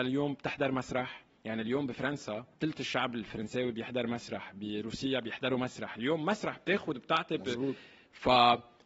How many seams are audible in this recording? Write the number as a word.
one